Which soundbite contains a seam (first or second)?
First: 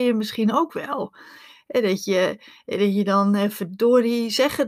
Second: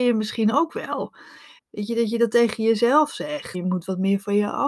second